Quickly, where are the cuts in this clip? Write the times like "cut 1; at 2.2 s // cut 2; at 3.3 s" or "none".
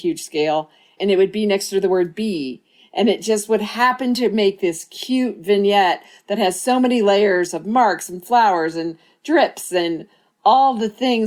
cut 1; at 1.0 s